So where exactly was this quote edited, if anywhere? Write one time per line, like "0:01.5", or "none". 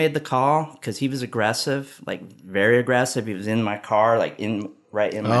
none

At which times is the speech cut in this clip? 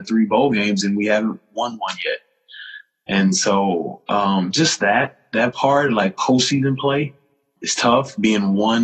0:07.6

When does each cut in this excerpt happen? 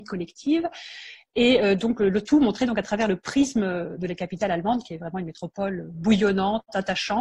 none

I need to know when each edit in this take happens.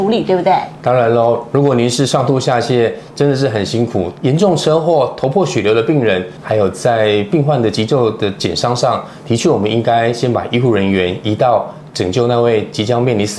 0:04.1
0:06.4

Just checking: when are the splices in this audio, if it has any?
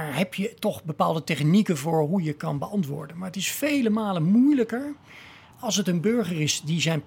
0:05.5

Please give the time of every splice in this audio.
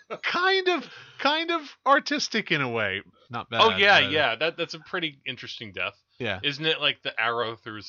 0:03.3

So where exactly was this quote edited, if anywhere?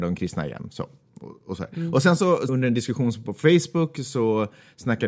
0:02.5

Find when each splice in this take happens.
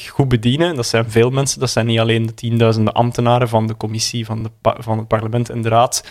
none

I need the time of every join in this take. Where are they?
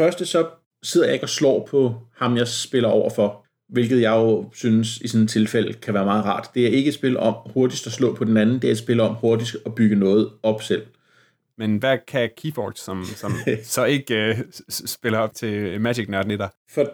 0:11.5

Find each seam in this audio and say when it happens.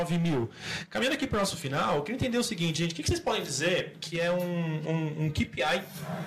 none

